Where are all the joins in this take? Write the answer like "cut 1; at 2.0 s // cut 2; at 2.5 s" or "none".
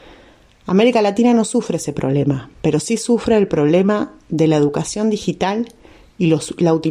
none